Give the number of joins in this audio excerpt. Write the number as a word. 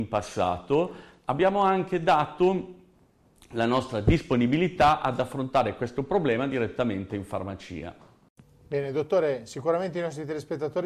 zero